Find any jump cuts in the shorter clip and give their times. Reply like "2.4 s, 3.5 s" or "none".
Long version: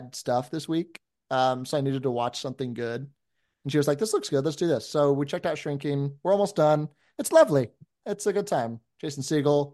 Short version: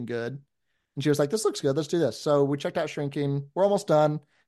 none